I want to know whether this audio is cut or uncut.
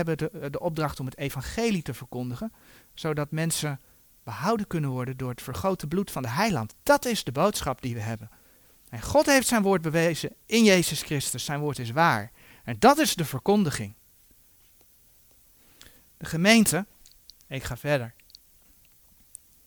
uncut